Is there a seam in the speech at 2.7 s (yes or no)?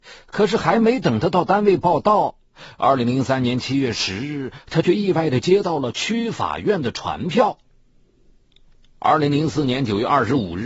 no